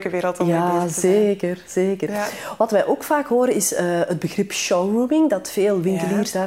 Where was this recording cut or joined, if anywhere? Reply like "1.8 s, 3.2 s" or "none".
none

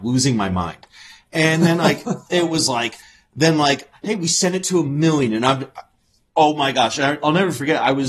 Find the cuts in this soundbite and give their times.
none

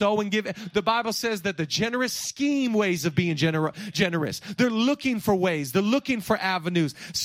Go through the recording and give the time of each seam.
none

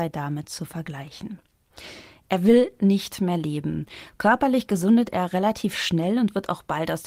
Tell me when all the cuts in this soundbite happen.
none

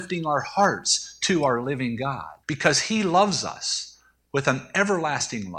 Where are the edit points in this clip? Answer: 2.4 s

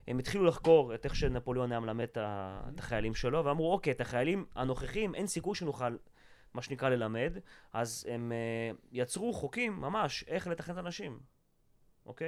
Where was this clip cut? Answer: none

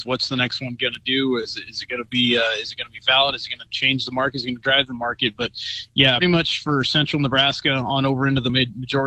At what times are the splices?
6.2 s

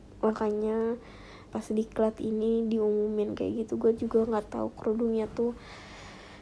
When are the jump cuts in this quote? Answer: 1.5 s

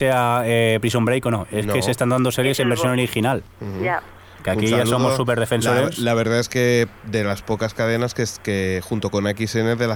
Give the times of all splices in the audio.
none

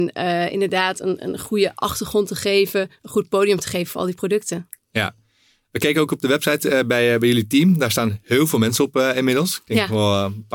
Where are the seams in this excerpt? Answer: none

